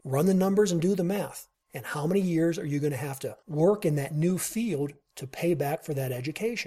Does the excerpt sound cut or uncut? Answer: cut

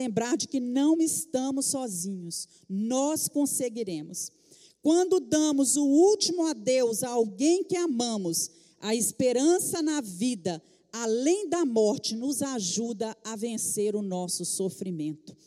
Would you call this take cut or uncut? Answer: uncut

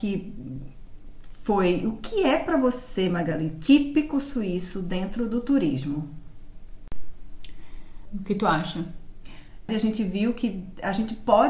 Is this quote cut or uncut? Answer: cut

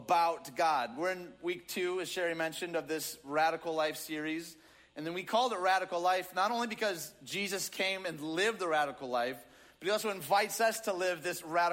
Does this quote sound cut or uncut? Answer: uncut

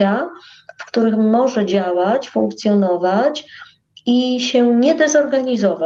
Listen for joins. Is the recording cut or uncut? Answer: uncut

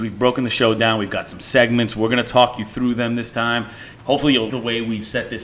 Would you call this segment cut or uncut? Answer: cut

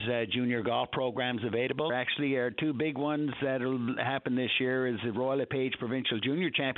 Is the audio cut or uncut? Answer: cut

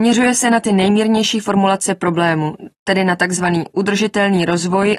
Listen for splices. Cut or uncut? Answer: uncut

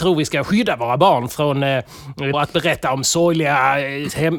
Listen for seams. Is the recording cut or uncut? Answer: cut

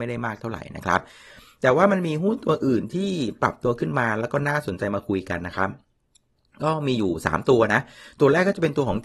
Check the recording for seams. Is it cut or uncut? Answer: uncut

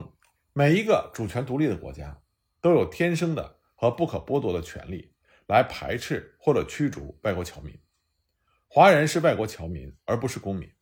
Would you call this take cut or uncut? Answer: uncut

